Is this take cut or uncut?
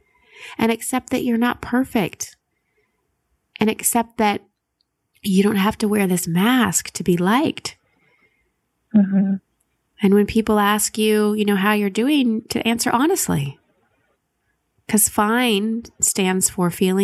uncut